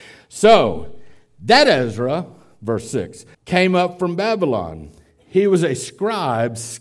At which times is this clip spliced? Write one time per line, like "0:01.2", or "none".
0:03.3

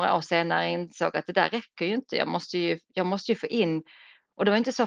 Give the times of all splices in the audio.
none

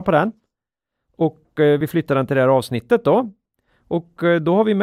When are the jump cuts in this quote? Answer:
none

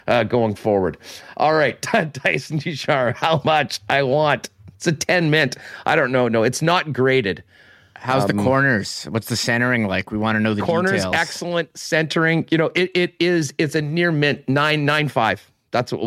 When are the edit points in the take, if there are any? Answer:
none

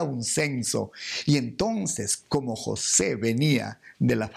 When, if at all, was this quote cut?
none

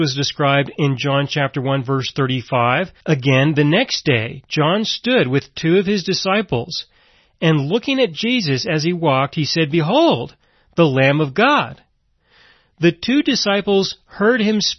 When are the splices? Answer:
0:03.0

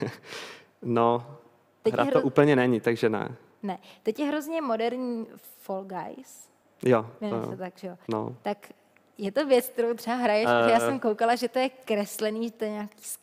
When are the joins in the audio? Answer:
none

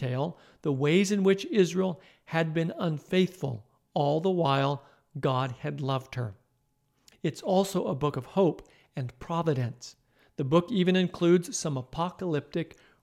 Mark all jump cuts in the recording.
0:07.1

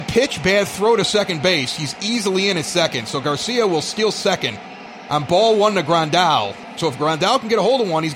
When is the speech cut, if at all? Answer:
0:06.8

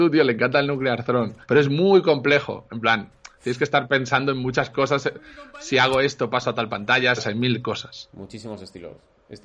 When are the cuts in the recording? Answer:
0:01.4
0:07.2

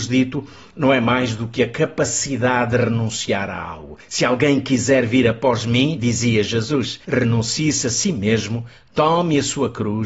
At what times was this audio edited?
none

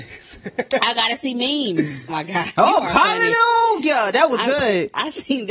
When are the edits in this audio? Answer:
0:02.1

